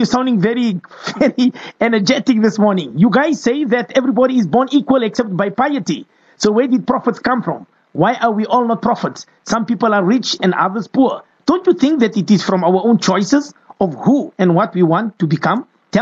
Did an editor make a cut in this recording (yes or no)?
no